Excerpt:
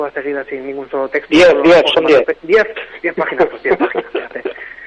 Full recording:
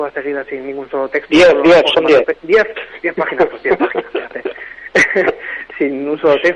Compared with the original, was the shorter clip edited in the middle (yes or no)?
no